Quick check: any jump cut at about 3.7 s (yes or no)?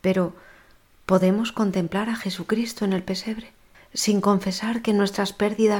yes